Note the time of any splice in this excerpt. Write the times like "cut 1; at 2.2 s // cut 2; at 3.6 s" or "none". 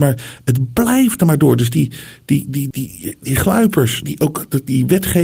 cut 1; at 2.7 s // cut 2; at 4.0 s